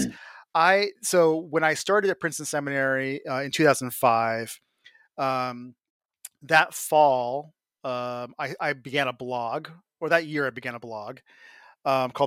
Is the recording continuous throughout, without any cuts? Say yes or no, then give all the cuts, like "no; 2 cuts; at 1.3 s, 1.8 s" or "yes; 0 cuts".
yes; 0 cuts